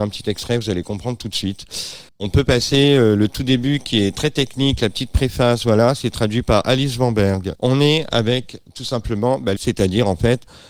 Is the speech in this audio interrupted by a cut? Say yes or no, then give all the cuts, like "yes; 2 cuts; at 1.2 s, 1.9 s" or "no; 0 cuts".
yes; 3 cuts; at 2.1 s, 7.6 s, 9.6 s